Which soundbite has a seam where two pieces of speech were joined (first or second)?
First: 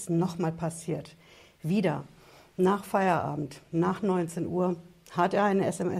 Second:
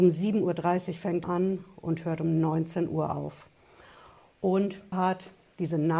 second